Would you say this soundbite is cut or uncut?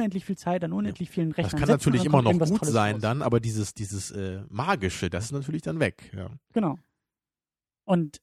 uncut